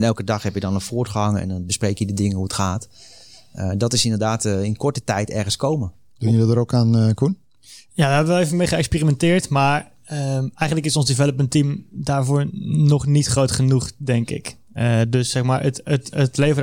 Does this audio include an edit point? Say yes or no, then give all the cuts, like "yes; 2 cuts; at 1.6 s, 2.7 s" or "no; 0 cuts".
no; 0 cuts